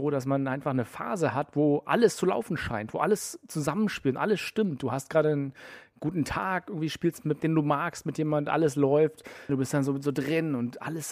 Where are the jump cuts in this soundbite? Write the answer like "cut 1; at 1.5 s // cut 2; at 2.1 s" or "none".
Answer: cut 1; at 7.4 s // cut 2; at 9.5 s